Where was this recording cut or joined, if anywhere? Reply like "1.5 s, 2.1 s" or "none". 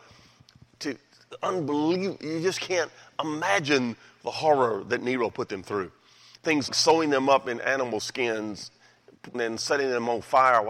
6.7 s, 9.3 s